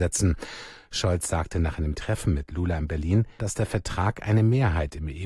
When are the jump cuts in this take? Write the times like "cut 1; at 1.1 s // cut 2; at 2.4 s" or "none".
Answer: cut 1; at 3.4 s